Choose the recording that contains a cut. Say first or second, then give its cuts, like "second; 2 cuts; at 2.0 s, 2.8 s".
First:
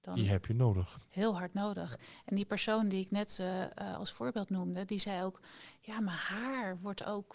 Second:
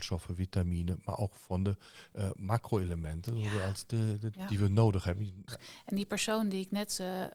second; 2 cuts; at 4.3 s, 5.5 s